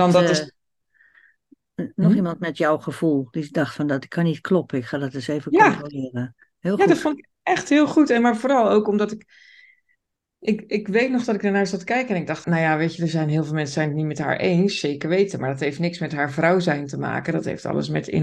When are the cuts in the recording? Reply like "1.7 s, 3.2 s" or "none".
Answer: 12.4 s